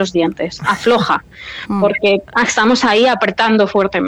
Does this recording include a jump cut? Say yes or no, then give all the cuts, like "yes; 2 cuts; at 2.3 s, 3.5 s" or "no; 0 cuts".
no; 0 cuts